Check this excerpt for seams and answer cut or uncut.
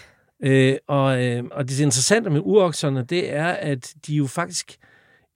cut